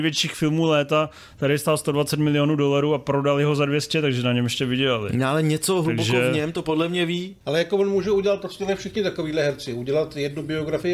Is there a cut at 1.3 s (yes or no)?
no